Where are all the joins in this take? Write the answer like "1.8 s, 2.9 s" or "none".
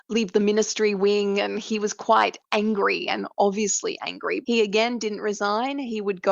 4.4 s